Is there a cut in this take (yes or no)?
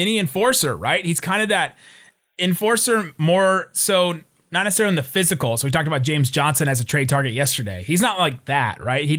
no